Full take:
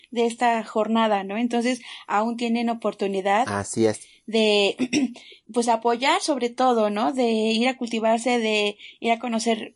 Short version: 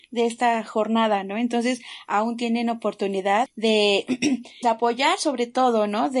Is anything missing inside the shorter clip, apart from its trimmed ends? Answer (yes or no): yes